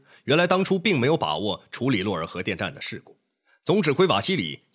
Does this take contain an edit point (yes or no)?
no